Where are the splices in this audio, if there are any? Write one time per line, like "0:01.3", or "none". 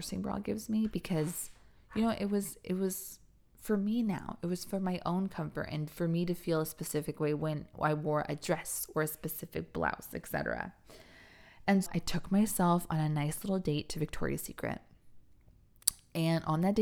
0:11.9